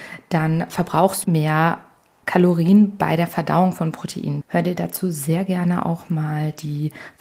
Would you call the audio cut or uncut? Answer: cut